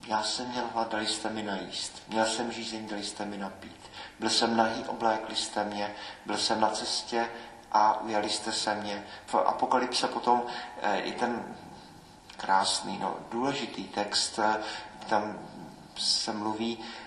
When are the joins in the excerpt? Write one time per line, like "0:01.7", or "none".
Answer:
0:09.3